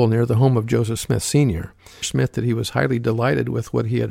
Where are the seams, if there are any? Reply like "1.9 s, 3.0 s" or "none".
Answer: 2.0 s